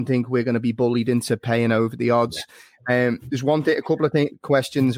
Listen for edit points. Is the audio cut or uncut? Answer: uncut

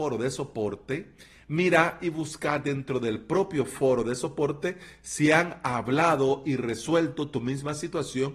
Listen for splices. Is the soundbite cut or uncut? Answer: uncut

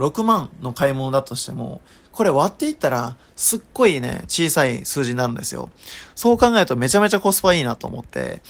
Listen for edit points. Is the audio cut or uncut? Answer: uncut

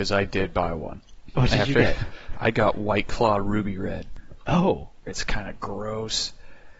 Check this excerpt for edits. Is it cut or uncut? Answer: cut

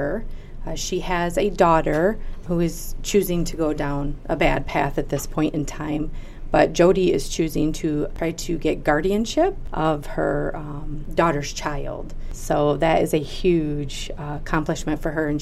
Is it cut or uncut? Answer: uncut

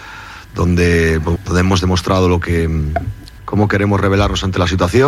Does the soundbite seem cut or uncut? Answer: cut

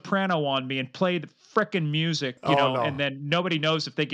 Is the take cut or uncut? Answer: uncut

